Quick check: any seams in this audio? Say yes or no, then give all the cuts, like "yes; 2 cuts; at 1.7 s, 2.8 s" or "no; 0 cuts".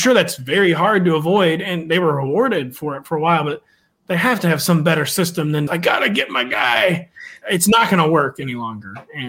yes; 2 cuts; at 5.7 s, 7.4 s